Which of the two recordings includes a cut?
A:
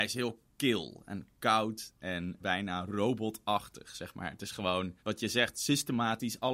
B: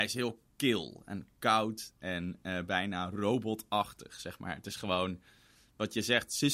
A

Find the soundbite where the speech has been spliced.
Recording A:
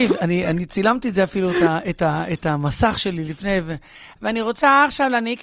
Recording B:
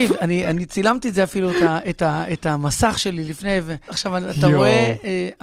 B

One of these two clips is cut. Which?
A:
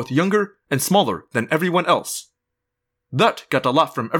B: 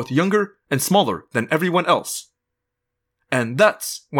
A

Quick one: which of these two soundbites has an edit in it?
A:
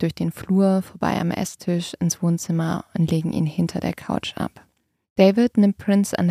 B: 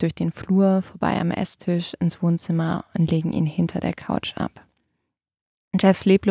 A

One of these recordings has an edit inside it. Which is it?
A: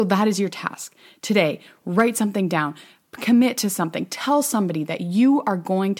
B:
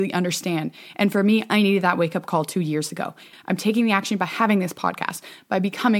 B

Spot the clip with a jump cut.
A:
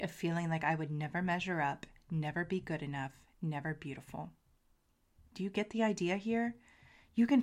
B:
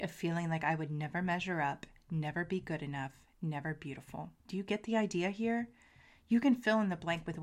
B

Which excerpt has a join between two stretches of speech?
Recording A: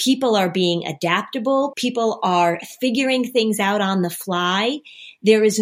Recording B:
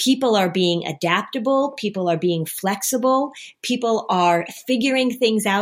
A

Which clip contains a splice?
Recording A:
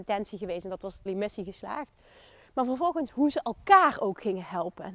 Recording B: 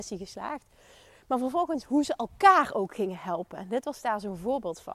A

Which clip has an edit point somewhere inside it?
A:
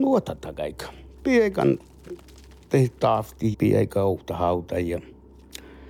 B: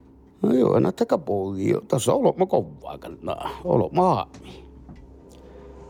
A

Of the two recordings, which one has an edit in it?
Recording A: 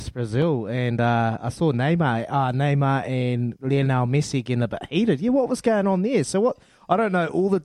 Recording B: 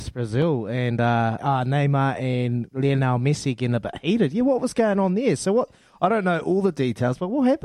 B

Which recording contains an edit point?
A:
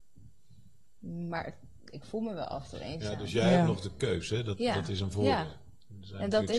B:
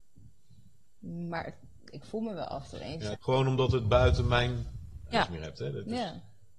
B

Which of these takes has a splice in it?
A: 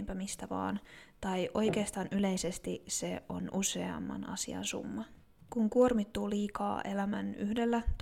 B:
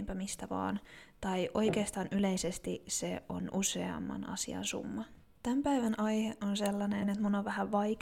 B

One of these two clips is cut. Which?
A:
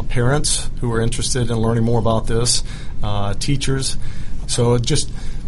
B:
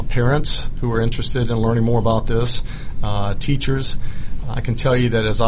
A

